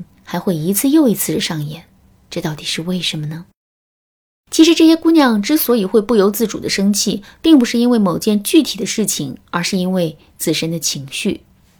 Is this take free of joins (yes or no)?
yes